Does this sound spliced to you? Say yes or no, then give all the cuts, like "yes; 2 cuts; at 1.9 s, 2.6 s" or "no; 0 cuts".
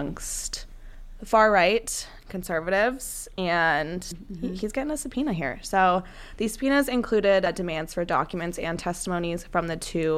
no; 0 cuts